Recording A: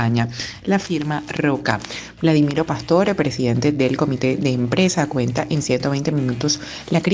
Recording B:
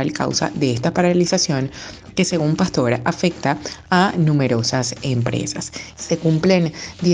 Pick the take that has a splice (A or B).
B